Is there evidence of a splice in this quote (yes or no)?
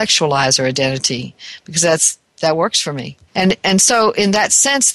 yes